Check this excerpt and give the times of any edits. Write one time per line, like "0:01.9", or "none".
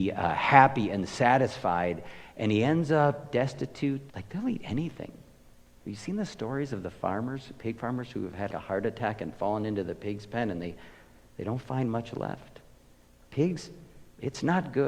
0:04.1
0:08.5

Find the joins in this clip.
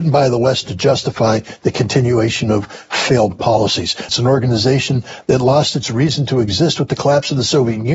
0:04.1

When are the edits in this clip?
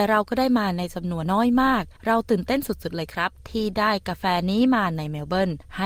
0:01.3

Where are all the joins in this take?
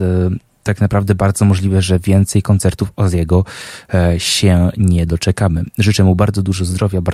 none

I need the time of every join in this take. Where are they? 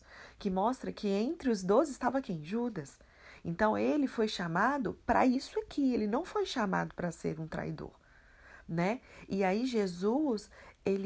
none

